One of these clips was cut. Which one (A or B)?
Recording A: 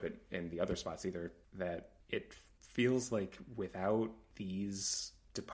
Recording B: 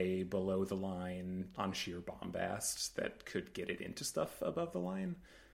B